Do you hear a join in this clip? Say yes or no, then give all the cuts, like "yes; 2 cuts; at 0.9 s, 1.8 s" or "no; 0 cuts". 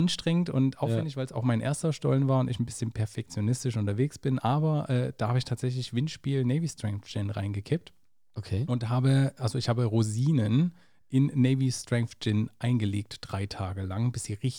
no; 0 cuts